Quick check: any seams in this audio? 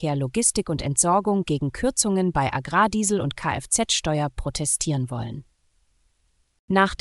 no; 0 cuts

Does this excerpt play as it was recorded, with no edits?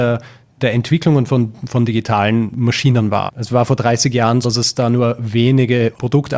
no; 2 cuts; at 3.3 s, 4.4 s

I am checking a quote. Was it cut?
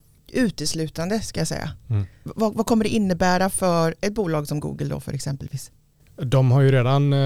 no; 0 cuts

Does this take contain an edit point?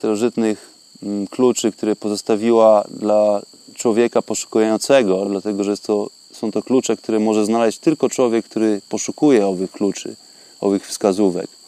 no; 0 cuts

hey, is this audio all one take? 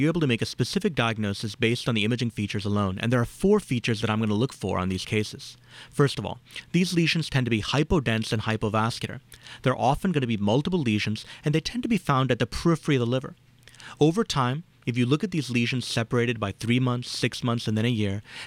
yes; 0 cuts

